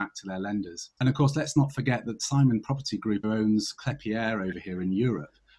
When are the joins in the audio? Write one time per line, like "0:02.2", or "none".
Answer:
0:01.0
0:03.2